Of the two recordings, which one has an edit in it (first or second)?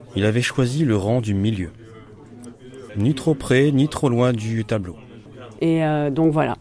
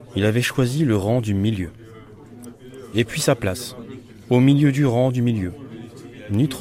first